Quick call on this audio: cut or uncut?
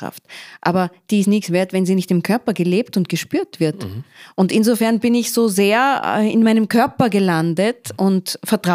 uncut